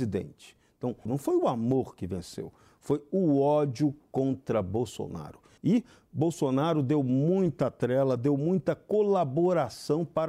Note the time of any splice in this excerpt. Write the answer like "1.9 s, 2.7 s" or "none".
1.1 s, 5.6 s